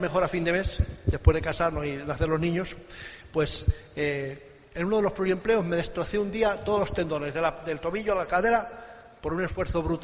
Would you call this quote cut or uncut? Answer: uncut